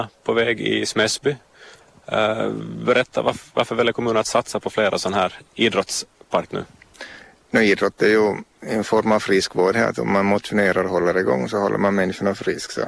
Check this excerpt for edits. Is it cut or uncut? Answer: cut